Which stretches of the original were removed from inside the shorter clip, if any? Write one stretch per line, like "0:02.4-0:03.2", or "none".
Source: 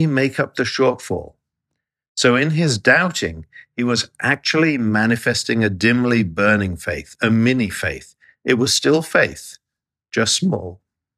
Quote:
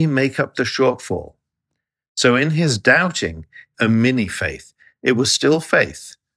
0:03.7-0:07.2